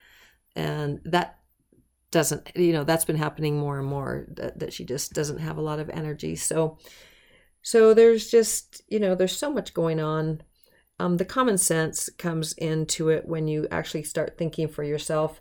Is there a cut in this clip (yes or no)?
no